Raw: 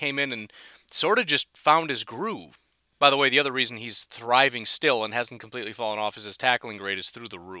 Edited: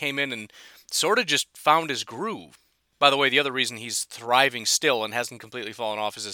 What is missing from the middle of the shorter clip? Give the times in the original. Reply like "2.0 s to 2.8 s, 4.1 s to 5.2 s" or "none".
none